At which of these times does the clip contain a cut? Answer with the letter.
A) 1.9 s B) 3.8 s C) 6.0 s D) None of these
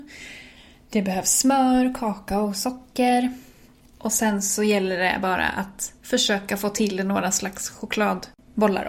C